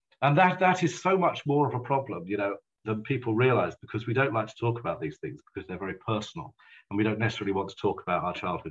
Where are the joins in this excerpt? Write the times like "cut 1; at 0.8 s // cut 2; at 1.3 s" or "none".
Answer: none